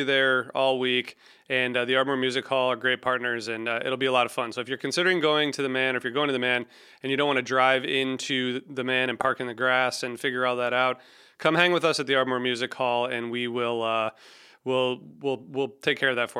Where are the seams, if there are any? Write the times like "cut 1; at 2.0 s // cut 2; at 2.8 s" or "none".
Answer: none